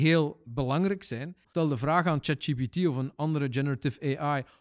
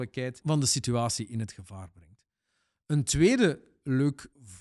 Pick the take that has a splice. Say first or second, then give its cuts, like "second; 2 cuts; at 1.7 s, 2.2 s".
first; 1 cut; at 1.4 s